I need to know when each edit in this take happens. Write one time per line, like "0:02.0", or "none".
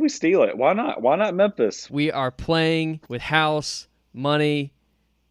0:01.9
0:03.0